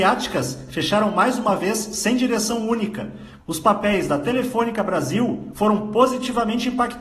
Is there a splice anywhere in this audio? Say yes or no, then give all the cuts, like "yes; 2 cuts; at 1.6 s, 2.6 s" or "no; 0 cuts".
yes; 2 cuts; at 3.4 s, 5.5 s